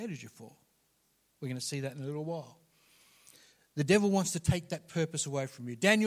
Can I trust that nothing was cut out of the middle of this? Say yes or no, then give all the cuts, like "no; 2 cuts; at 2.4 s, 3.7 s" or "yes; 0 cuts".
yes; 0 cuts